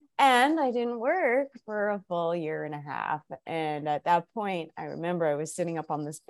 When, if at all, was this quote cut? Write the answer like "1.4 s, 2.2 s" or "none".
none